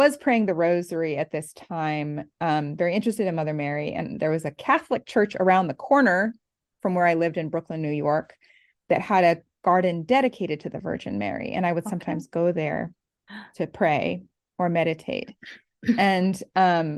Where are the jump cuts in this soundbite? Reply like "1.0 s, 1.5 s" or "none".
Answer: none